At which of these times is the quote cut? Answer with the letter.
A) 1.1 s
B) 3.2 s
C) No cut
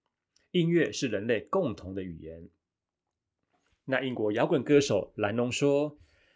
B